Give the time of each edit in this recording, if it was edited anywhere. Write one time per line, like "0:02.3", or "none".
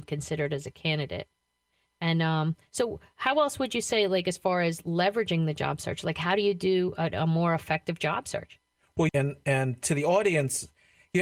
0:09.1

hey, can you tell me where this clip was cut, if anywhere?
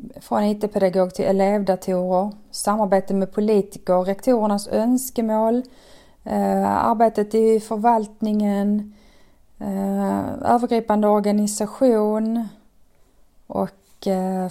none

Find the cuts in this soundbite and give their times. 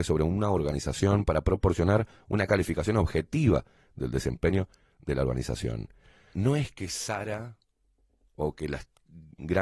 0:06.3

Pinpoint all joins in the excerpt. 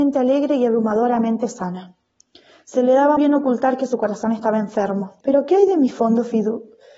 0:03.2
0:05.2

